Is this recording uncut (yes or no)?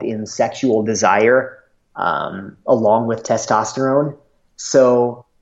yes